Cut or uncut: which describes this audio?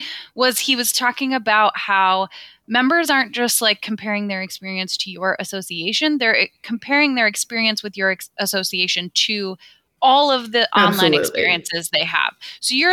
uncut